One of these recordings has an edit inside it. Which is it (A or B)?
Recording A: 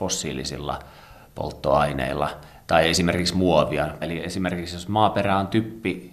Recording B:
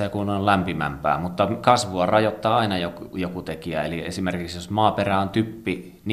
A